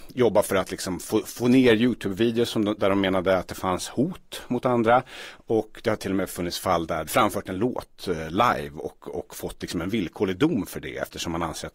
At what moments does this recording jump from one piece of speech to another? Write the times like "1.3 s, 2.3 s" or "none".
7.1 s

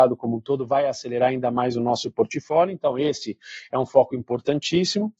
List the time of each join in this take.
none

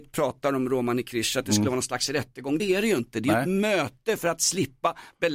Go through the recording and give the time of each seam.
none

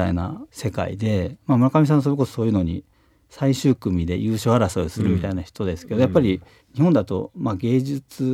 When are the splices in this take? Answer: none

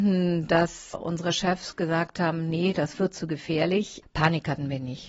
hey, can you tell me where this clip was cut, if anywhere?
0.9 s, 4.0 s

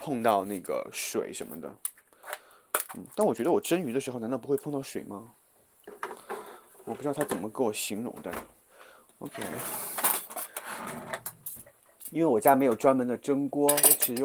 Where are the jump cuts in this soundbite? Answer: none

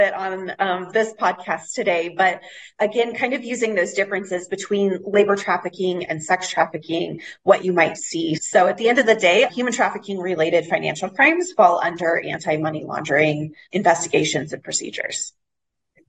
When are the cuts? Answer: 8.4 s, 9.5 s, 13.7 s

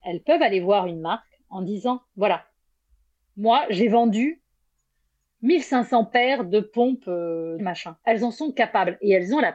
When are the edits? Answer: 7.6 s

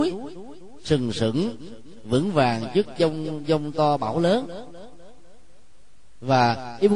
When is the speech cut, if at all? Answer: none

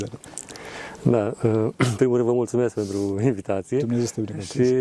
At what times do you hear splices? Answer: none

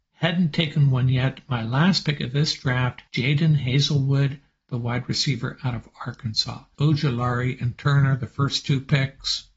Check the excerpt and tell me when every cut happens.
3.1 s, 6.7 s

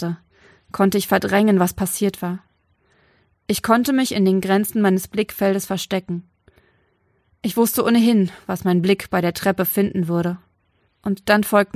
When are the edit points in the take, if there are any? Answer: 10.9 s

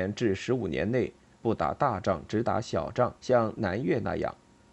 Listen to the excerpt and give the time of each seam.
1.4 s, 3.2 s

